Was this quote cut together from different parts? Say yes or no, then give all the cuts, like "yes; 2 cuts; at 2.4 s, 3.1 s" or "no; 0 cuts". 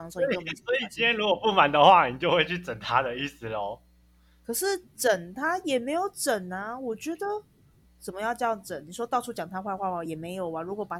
no; 0 cuts